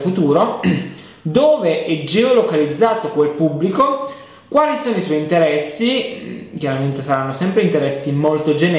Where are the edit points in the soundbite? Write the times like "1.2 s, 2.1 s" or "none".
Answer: none

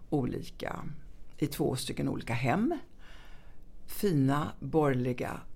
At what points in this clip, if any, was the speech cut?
none

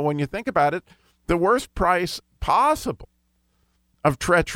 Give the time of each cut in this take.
none

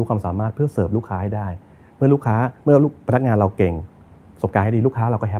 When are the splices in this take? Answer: none

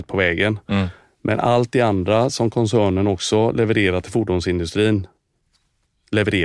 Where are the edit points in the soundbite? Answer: none

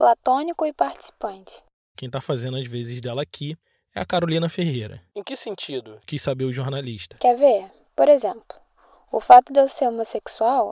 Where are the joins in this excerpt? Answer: 1.9 s

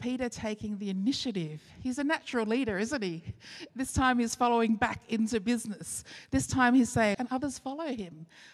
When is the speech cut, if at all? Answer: 3.7 s, 7.1 s

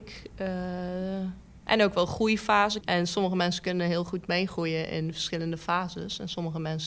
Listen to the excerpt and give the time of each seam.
2.8 s

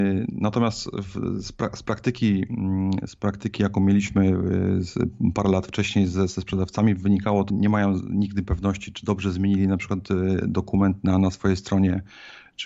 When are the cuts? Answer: 7.5 s

